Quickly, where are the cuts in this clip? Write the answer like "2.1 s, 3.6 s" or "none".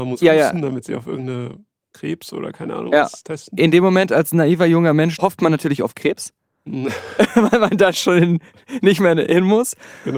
5.2 s